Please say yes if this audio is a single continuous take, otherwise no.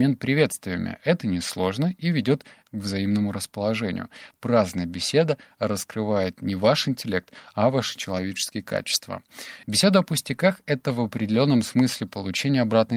no